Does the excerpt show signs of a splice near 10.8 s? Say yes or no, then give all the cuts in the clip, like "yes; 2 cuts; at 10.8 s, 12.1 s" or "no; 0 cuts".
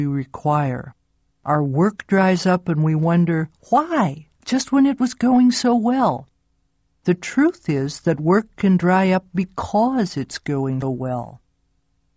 yes; 1 cut; at 10.8 s